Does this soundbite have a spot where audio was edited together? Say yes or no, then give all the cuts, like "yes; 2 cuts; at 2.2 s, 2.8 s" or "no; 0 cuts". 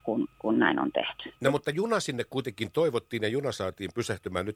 yes; 1 cut; at 1.3 s